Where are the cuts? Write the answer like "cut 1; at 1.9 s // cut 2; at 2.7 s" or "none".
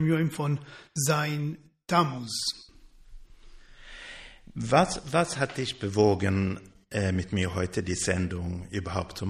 none